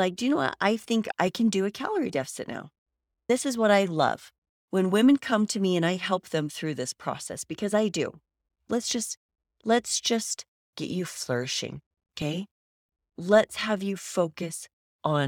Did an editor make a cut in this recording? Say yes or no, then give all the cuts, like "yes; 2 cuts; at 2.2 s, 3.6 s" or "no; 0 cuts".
no; 0 cuts